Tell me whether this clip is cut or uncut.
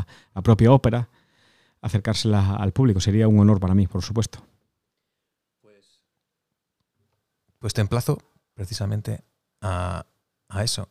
uncut